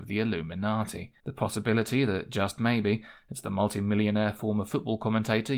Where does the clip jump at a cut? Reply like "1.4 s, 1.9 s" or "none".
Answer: 1.2 s